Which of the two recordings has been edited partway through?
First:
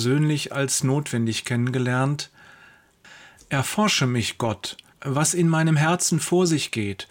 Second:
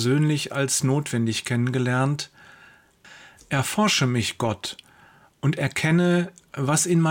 first; 1 cut; at 4.9 s

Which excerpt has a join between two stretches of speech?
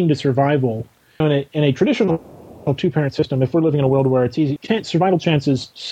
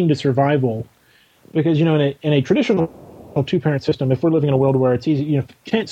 first; 2 cuts; at 1.2 s, 4.6 s

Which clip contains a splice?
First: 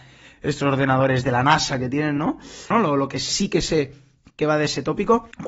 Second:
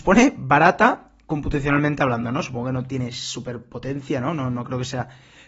first; 1 cut; at 2.7 s

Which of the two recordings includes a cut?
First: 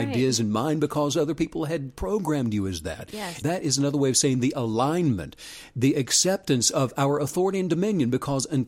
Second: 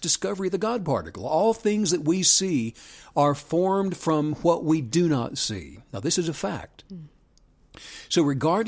first; 1 cut; at 3.4 s

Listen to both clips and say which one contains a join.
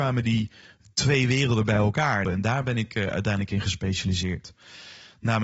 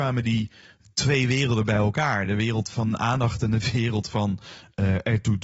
first; 1 cut; at 2.2 s

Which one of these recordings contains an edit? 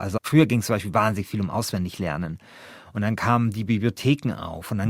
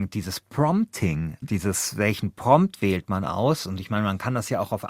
second; 1 cut; at 1.4 s

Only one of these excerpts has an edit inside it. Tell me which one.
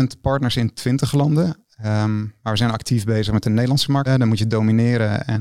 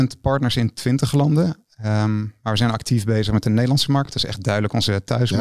first; 1 cut; at 4.1 s

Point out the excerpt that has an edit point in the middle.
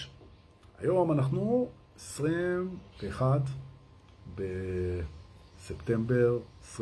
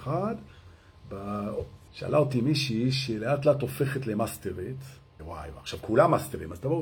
second; 2 cuts; at 1.9 s, 5.2 s

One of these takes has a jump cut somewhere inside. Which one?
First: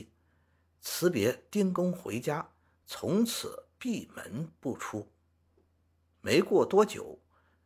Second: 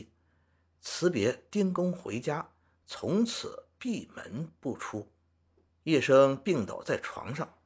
second; 1 cut; at 5.7 s

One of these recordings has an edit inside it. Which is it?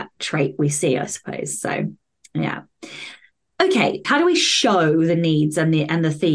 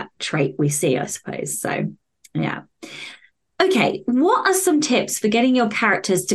first; 1 cut; at 4.0 s

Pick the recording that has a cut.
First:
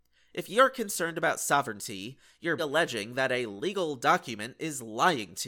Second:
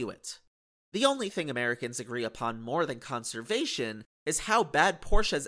first; 1 cut; at 2.6 s

